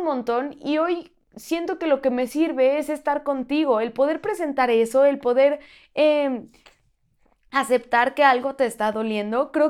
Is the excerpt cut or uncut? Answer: uncut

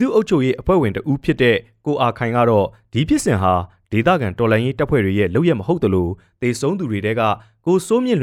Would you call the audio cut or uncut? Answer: uncut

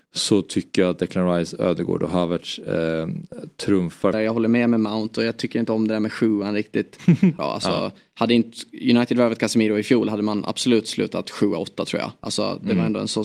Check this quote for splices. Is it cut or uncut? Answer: cut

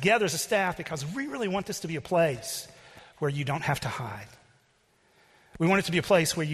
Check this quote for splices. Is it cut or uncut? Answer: uncut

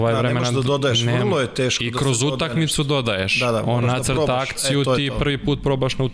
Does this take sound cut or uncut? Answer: uncut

